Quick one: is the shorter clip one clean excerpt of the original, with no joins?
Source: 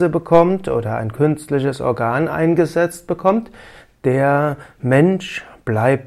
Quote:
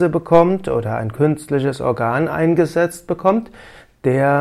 yes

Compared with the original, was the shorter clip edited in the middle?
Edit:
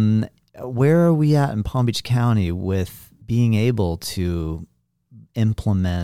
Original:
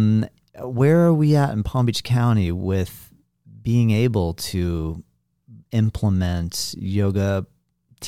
yes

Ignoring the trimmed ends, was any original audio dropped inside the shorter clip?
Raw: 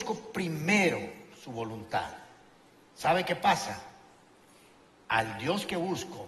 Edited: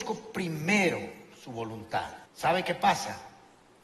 yes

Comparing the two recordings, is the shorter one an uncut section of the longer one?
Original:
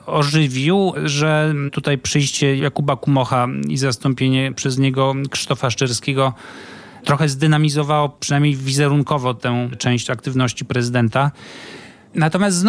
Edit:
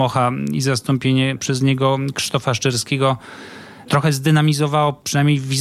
yes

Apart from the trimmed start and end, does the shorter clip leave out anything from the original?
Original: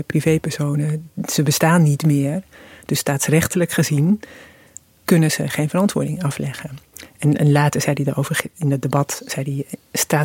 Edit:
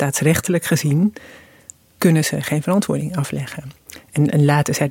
no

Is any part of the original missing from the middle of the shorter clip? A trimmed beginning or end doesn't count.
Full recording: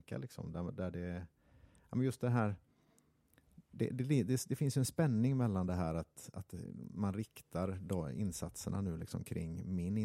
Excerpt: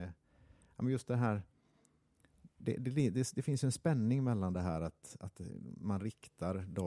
no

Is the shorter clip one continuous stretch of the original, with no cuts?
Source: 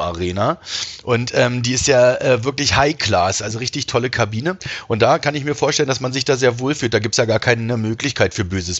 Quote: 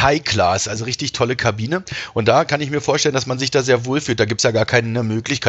yes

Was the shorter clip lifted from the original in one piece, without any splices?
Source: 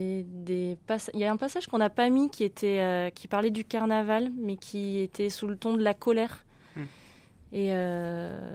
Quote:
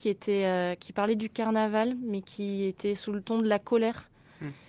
yes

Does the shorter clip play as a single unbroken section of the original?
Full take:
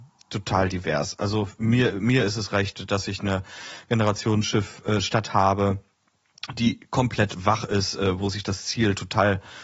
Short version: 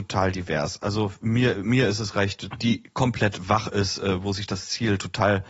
no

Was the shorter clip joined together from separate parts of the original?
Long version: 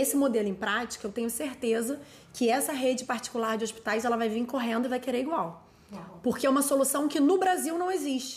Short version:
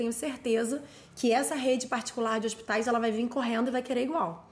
no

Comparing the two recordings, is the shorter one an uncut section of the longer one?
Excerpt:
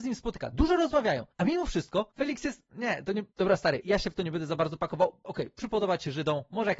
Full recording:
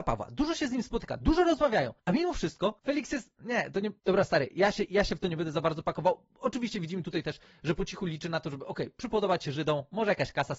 no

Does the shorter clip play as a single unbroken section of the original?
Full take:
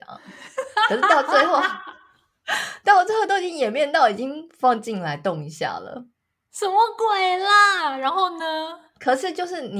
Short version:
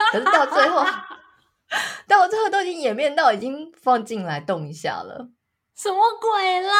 yes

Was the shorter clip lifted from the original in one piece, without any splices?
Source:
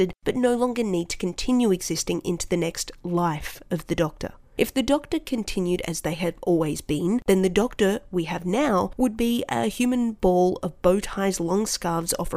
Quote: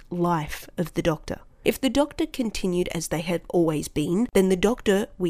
yes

